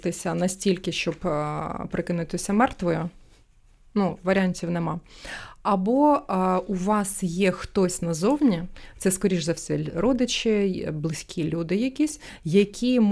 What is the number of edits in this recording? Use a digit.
1